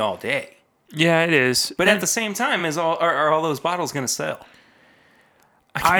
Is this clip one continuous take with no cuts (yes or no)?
yes